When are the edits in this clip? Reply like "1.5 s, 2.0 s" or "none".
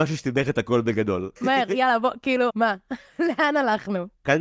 1.4 s, 2.5 s